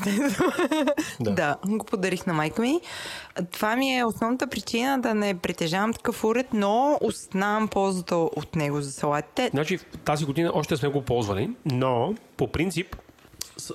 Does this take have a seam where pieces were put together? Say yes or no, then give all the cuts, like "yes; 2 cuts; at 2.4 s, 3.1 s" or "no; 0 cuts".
yes; 1 cut; at 9.5 s